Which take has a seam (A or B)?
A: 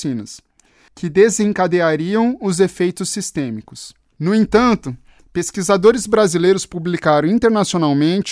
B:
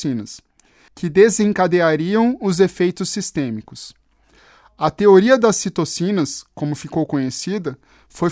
A